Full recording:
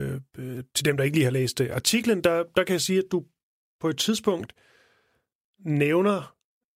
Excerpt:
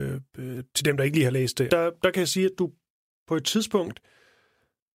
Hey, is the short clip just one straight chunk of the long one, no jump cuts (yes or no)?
no